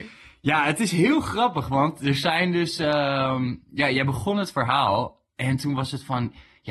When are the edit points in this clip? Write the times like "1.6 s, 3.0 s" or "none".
none